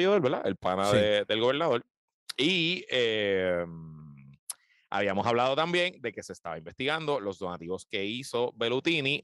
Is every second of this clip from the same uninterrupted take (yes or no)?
yes